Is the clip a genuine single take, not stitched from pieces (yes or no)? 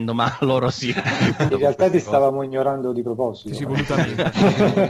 no